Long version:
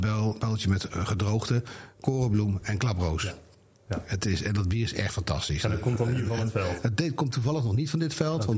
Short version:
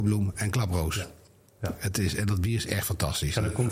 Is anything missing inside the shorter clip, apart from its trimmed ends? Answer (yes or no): no